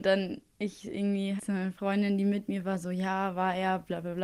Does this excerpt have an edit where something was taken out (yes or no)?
yes